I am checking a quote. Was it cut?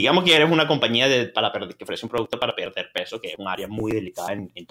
no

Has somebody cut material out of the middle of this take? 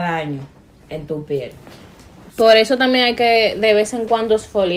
yes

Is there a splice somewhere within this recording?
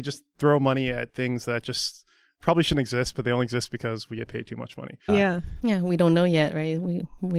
yes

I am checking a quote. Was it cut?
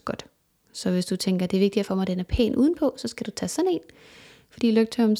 no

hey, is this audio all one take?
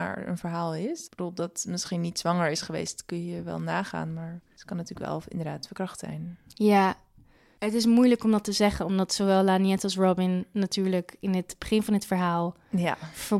yes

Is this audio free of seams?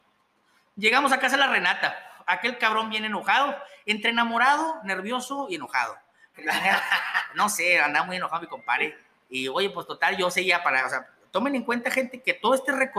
no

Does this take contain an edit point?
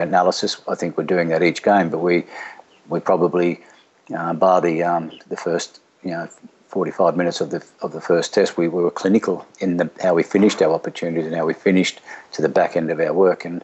no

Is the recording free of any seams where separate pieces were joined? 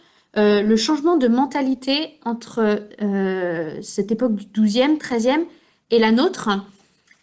yes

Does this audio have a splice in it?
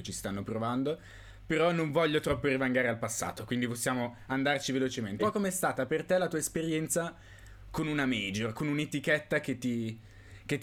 yes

